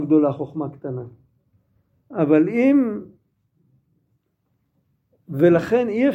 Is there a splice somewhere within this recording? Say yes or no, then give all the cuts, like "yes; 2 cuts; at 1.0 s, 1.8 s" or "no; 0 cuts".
no; 0 cuts